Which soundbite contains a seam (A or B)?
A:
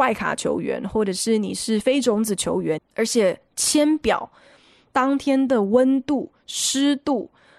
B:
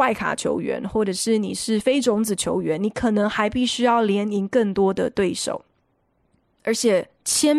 A